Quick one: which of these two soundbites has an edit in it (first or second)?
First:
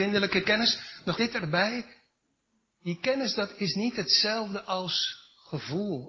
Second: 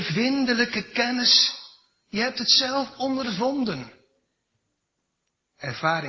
first